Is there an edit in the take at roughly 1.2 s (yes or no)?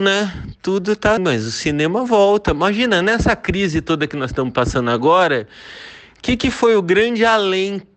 yes